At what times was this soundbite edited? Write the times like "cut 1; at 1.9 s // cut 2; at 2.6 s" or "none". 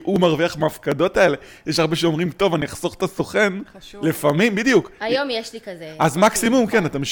none

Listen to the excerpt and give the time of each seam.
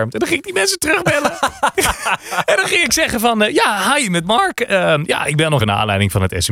cut 1; at 5.6 s

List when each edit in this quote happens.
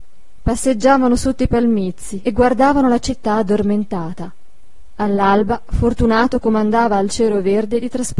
cut 1; at 2.2 s

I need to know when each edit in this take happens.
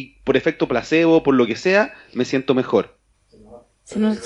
cut 1; at 3.1 s

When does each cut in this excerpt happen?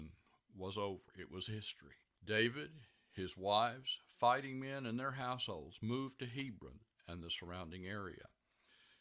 none

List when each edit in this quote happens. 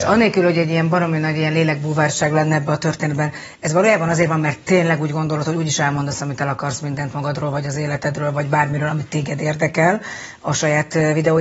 none

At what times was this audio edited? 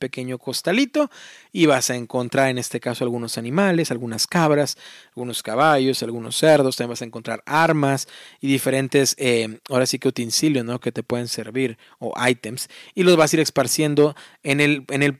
none

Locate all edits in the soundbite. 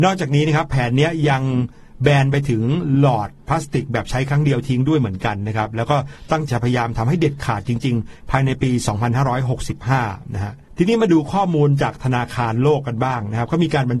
cut 1; at 6.5 s

